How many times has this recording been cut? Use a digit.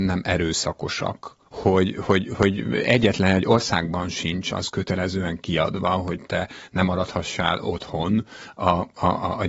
1